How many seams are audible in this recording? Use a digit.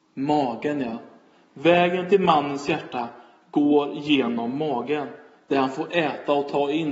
0